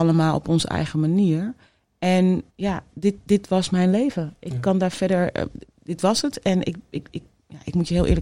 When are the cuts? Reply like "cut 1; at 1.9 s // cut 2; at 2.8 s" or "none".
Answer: cut 1; at 2.5 s